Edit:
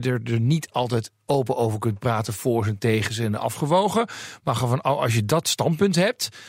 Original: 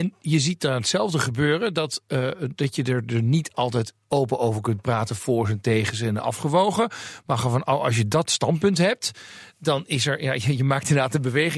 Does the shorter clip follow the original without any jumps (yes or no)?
yes